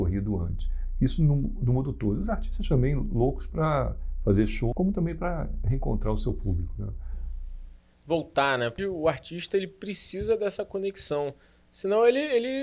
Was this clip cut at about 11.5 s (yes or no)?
no